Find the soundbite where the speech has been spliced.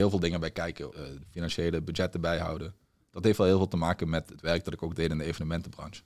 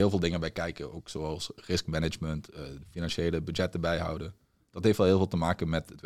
first; 1 cut; at 0.9 s

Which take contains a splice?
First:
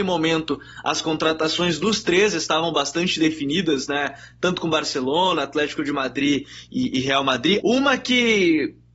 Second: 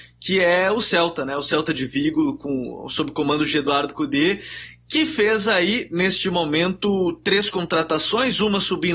first; 1 cut; at 7.6 s

